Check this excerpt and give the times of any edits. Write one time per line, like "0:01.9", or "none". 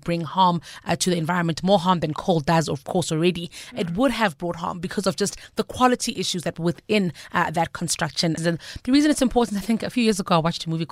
0:08.4